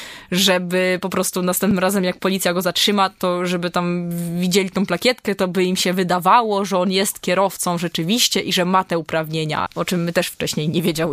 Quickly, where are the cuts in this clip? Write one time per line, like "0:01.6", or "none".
0:09.7